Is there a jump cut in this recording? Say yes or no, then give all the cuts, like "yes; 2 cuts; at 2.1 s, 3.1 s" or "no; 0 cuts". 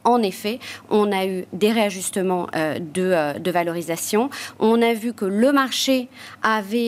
no; 0 cuts